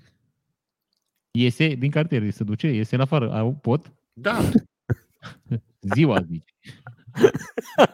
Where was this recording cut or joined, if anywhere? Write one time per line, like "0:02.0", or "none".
0:04.0